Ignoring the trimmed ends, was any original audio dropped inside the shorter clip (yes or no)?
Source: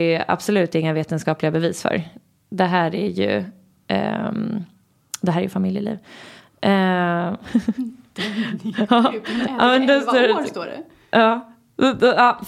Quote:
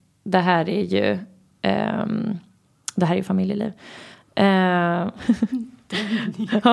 no